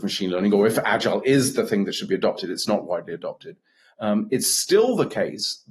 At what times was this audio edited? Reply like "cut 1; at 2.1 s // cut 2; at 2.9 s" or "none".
cut 1; at 3.9 s

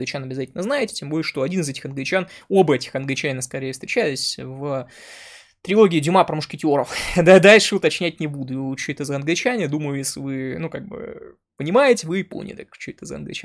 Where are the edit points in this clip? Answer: none

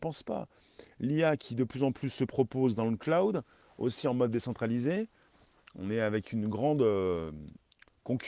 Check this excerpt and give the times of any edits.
none

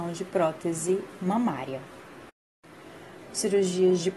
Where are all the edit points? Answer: cut 1; at 3.3 s

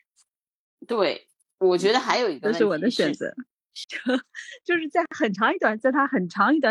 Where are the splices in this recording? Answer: cut 1; at 3.8 s // cut 2; at 5.8 s

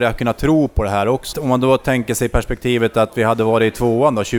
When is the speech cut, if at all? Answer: cut 1; at 1.3 s

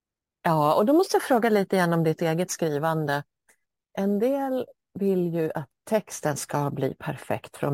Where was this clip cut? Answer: none

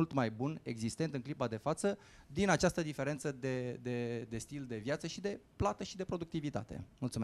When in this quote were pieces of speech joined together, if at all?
none

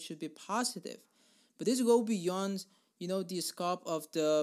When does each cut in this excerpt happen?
none

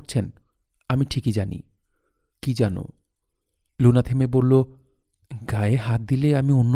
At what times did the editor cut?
cut 1; at 4.0 s

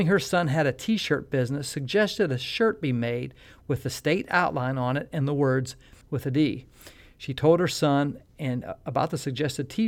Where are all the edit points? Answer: cut 1; at 6.0 s

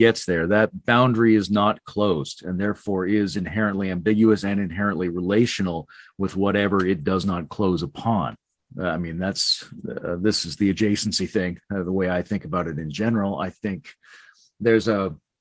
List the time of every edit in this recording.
cut 1; at 8.6 s

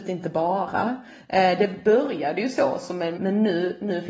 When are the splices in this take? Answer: cut 1; at 3.2 s

